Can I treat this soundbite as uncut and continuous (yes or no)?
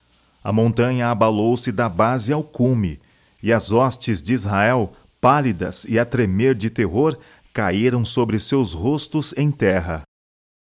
yes